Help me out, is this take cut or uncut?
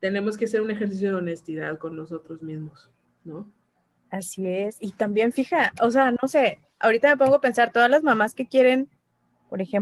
uncut